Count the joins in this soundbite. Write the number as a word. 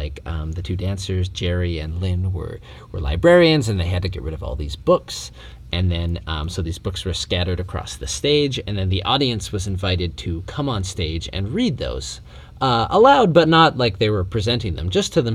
zero